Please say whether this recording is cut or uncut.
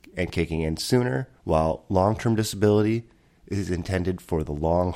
cut